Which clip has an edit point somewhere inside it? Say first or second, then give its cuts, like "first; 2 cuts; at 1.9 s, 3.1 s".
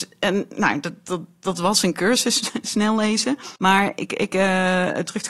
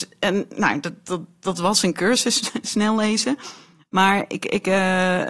first; 1 cut; at 3.6 s